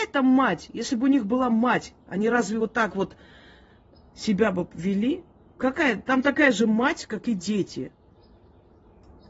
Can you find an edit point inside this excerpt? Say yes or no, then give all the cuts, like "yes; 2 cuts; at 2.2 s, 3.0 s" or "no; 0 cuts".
no; 0 cuts